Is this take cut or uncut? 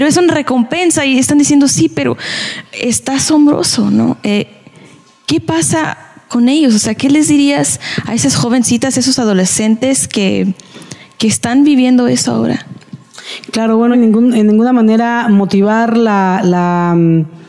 cut